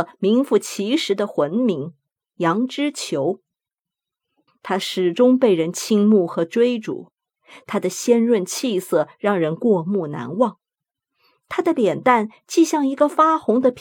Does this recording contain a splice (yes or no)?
yes